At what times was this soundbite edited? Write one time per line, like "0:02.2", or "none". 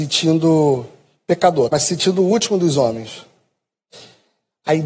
0:01.7